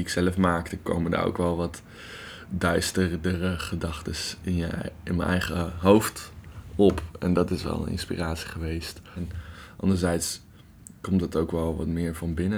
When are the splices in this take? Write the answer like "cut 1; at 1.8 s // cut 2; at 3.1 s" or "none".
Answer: cut 1; at 9.2 s